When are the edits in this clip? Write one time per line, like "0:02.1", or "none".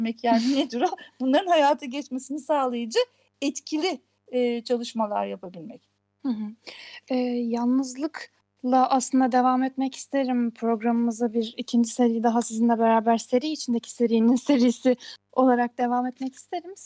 none